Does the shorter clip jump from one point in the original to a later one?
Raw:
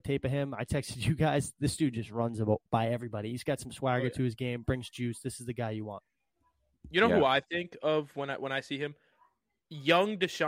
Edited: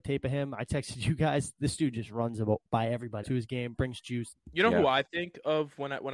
yes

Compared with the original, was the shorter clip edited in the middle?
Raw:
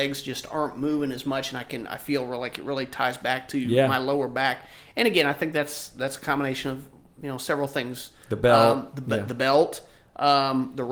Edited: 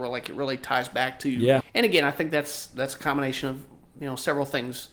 yes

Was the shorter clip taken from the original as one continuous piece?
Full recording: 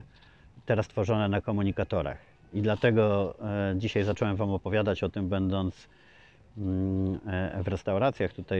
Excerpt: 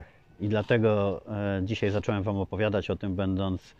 yes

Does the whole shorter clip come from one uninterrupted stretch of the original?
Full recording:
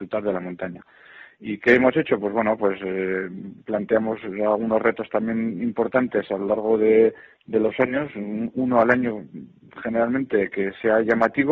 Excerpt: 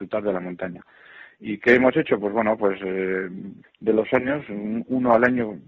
no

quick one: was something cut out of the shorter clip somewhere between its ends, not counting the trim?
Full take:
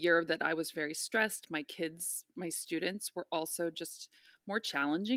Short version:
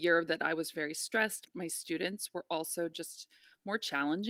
yes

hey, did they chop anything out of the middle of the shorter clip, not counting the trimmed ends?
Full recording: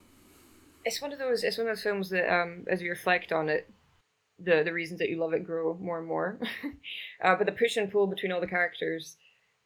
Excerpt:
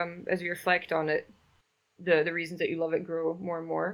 no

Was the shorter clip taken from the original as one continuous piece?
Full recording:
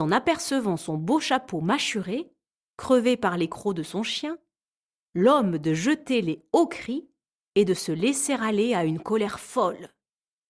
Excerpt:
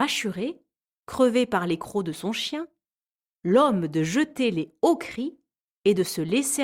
yes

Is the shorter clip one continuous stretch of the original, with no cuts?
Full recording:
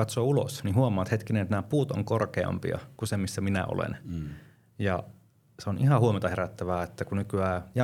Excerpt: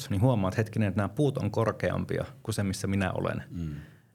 yes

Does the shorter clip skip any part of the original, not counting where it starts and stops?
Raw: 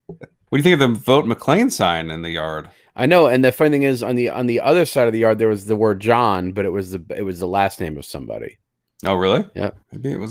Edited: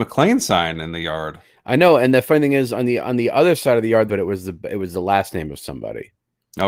yes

